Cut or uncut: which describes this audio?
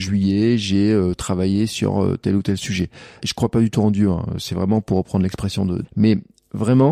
cut